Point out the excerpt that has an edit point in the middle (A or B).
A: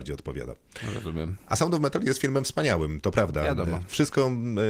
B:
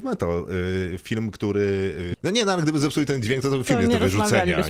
B